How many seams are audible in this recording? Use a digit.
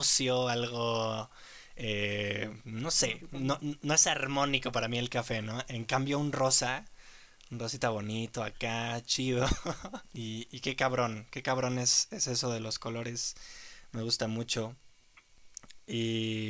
1